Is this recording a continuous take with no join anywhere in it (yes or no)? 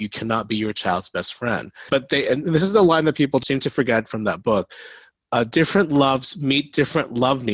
no